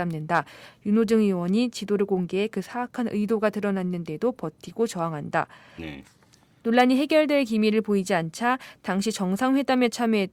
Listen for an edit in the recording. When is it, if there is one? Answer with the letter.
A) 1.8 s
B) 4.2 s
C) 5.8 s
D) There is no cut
C